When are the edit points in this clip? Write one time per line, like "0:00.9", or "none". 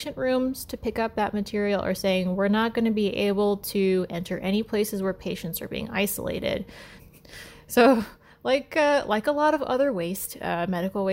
0:07.0